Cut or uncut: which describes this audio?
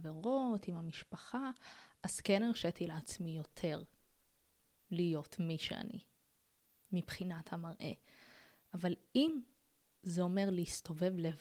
uncut